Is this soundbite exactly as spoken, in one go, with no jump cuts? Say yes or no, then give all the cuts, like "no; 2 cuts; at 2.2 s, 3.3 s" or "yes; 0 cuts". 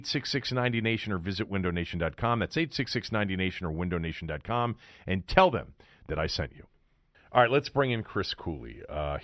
yes; 0 cuts